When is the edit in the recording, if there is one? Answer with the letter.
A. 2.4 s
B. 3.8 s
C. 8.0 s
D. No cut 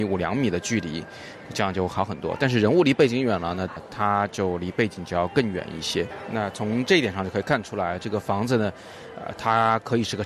B